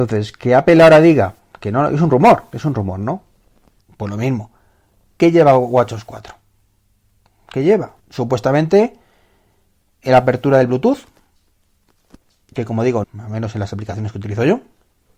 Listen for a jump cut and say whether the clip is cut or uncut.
cut